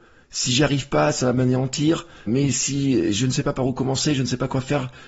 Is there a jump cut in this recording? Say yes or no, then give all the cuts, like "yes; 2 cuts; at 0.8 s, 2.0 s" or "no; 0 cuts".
yes; 1 cut; at 2.3 s